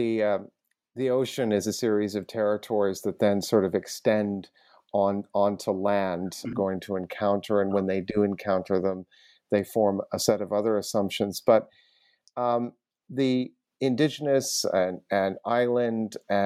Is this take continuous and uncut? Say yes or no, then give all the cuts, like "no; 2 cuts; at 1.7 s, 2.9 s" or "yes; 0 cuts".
no; 1 cut; at 6.5 s